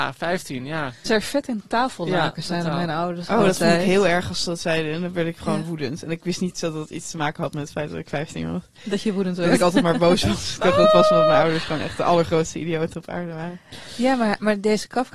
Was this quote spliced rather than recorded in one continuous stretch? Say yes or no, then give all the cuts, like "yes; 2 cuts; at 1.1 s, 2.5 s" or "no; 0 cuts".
yes; 1 cut; at 1.1 s